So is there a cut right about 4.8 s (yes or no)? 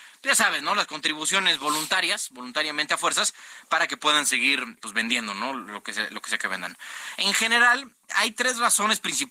yes